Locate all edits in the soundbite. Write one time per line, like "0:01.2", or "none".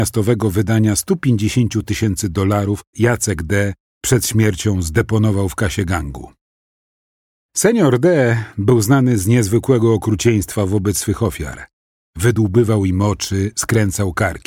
0:02.9